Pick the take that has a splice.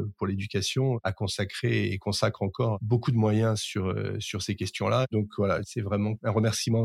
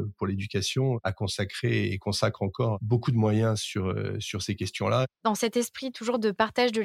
second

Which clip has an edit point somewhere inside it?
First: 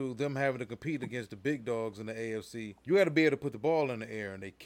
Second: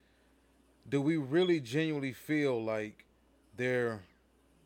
first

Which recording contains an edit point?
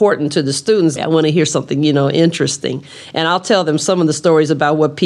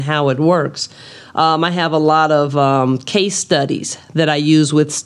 first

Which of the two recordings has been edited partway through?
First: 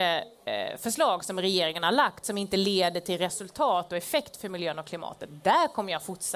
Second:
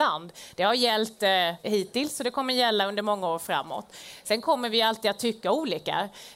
second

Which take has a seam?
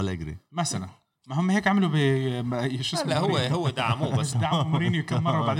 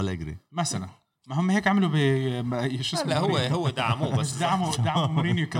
first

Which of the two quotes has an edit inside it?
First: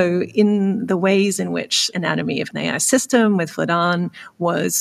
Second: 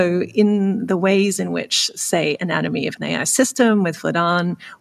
first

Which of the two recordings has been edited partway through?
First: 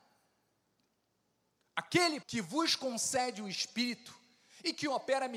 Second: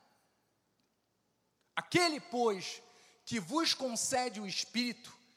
first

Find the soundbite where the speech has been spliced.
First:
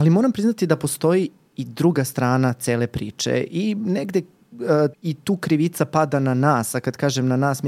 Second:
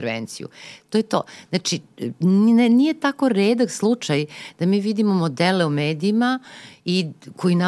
first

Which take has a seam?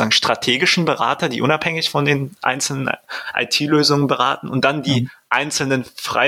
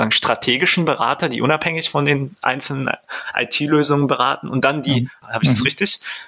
second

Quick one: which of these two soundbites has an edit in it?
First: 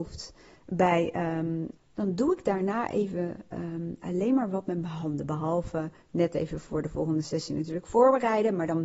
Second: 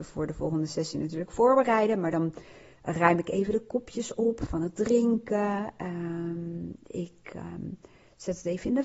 first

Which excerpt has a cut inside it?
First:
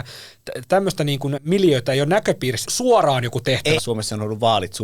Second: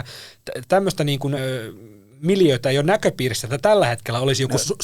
first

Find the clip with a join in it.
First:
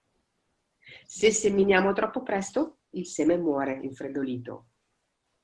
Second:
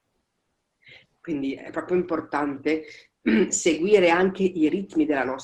second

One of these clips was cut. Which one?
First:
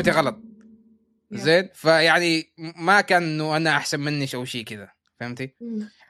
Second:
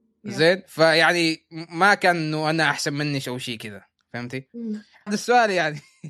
second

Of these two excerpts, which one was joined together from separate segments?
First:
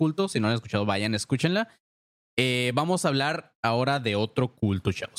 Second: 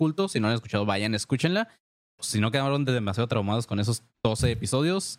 second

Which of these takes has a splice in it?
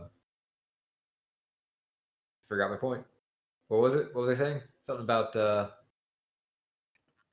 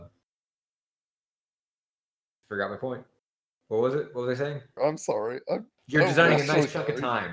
second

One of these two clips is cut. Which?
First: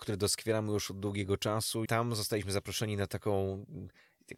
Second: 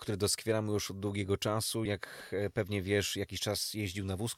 first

